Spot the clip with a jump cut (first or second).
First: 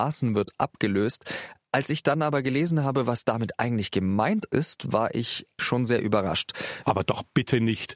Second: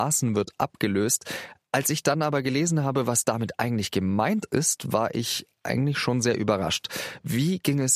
first